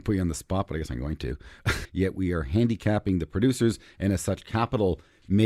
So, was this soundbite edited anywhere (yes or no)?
yes